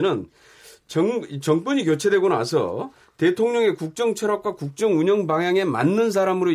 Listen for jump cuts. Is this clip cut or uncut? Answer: uncut